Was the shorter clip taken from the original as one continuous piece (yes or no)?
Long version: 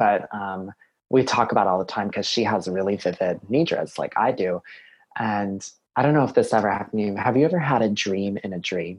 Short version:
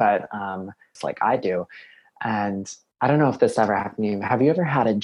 no